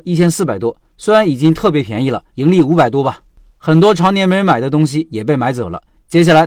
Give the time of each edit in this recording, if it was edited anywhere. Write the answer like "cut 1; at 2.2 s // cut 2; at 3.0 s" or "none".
cut 1; at 2.3 s